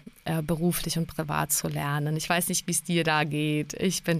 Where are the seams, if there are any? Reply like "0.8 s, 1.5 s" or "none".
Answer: none